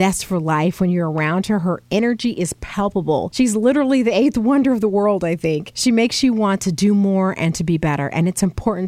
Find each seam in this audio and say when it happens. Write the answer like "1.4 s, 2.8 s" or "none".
none